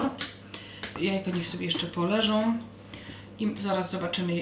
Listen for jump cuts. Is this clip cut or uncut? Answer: cut